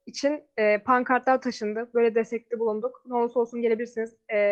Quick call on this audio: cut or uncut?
cut